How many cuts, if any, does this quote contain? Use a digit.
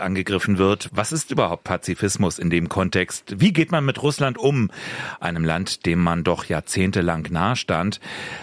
0